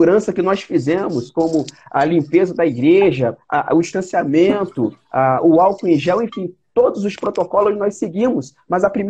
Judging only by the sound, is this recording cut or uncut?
uncut